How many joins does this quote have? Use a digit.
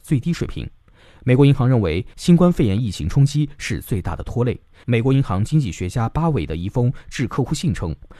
1